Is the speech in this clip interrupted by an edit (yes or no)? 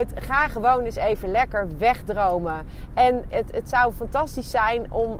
yes